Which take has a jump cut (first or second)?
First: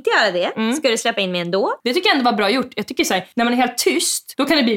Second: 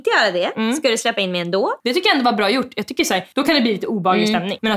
second